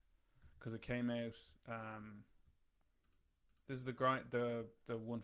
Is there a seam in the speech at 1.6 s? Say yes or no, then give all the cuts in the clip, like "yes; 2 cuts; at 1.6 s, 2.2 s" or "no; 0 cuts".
no; 1 cut; at 3.7 s